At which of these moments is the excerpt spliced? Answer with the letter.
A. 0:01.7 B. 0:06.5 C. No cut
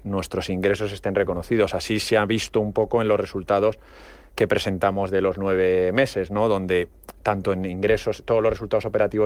C